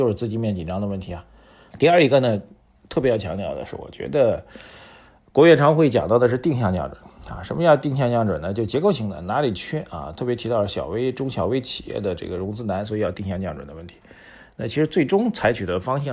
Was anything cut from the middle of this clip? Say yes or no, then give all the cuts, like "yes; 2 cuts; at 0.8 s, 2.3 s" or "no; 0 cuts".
yes; 1 cut; at 1.7 s